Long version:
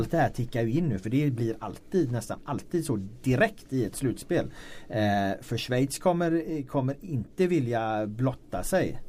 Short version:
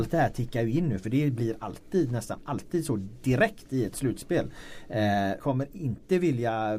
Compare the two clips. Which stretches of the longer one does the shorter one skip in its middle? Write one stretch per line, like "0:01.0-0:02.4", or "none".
0:05.4-0:06.7